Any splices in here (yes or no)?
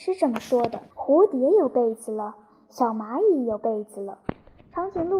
yes